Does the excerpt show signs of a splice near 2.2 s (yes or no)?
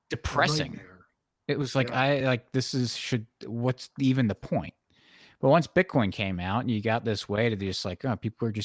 no